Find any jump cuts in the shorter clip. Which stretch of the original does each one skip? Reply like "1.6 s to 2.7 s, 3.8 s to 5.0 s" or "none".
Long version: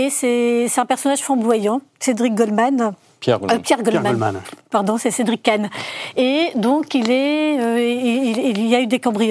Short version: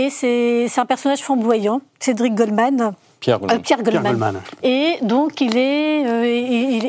4.6 s to 6.1 s